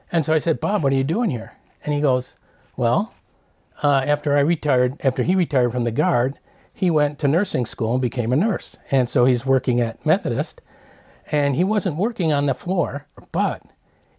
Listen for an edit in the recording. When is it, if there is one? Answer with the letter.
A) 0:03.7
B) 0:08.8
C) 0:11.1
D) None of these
D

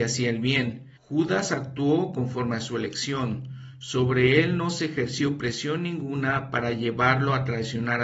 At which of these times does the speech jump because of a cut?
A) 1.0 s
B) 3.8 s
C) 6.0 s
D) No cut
A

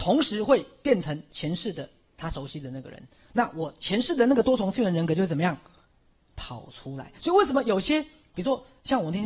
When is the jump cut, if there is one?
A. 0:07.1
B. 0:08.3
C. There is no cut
B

